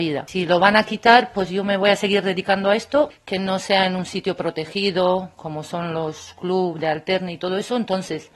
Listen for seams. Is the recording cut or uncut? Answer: uncut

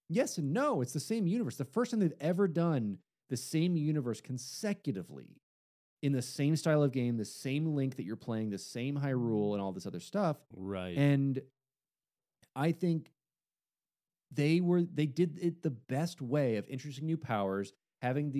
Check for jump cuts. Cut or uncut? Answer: uncut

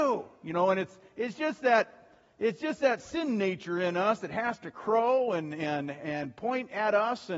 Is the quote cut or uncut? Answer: uncut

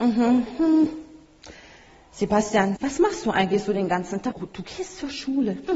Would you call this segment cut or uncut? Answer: cut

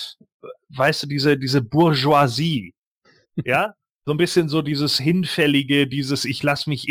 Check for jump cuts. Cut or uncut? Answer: uncut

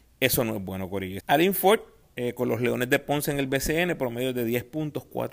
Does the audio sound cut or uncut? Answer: cut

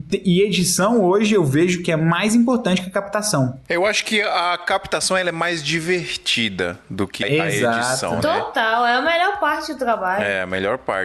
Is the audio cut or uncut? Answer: cut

